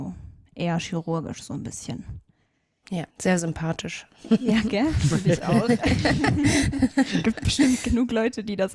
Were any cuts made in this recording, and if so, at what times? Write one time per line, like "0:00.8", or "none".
0:03.1